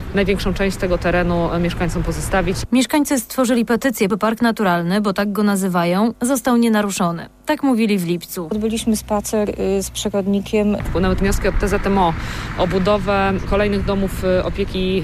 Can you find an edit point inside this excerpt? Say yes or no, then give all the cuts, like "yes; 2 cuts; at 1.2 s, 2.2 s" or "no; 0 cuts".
yes; 2 cuts; at 4.1 s, 10.8 s